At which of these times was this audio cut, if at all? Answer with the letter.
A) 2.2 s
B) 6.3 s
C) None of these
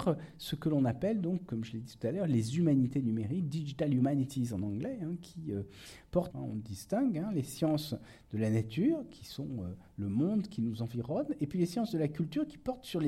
B